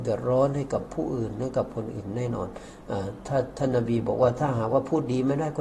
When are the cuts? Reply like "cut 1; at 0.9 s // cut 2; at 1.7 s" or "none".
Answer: none